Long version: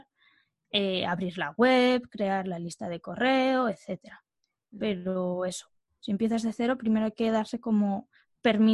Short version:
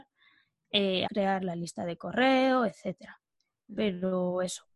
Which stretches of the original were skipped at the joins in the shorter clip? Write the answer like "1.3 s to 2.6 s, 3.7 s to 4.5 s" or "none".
1.1 s to 2.1 s

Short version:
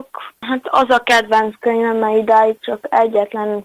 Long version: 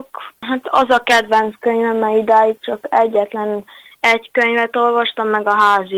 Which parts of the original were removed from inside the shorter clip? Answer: none

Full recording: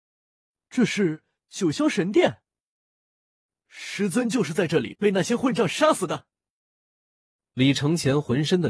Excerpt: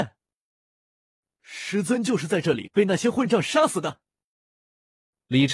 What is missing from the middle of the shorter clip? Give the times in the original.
none

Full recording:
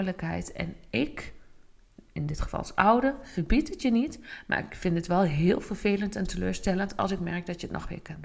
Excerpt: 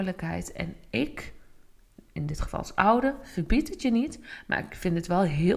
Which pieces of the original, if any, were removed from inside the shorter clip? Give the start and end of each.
none

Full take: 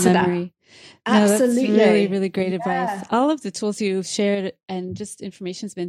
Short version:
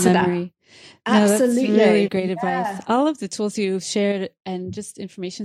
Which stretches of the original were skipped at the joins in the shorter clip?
2.1 s to 2.3 s

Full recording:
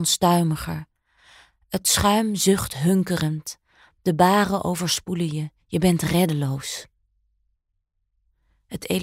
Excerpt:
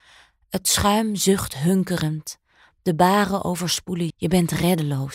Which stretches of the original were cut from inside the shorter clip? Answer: 5.3 s to 5.6 s

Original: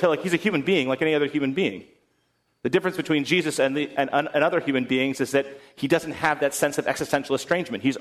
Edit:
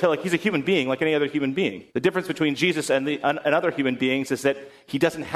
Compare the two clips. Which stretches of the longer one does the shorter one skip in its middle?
1.9 s to 2.6 s, 3.9 s to 4.1 s

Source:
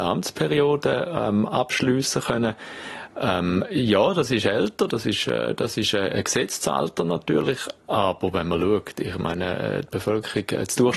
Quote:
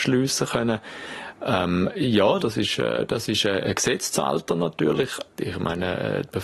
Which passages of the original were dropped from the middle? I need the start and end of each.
4.1 s to 4.9 s, 7.8 s to 9.0 s

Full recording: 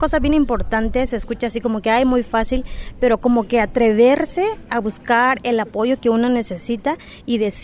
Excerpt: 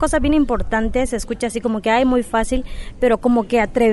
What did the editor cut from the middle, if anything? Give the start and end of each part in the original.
none

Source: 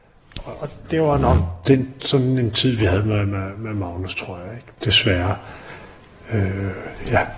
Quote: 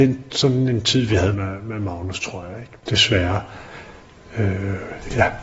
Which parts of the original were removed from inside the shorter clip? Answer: 3.0 s to 3.3 s

